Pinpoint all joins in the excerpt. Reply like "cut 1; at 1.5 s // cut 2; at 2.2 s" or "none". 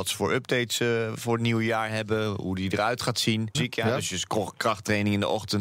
cut 1; at 3.5 s